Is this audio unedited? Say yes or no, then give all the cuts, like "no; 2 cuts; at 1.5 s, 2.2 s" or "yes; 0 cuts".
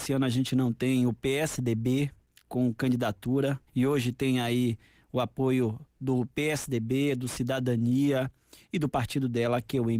no; 1 cut; at 3.7 s